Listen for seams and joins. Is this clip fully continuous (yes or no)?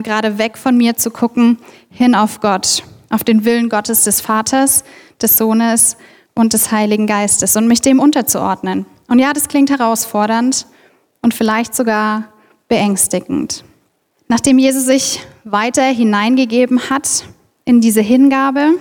no